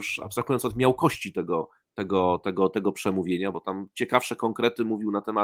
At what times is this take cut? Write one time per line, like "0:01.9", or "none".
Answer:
none